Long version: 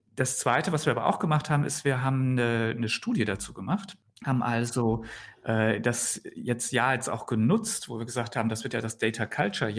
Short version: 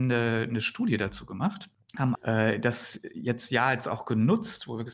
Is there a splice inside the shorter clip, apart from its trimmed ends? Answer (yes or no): yes